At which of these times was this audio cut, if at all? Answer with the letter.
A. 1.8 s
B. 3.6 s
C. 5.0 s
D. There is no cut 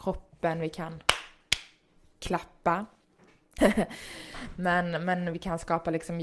B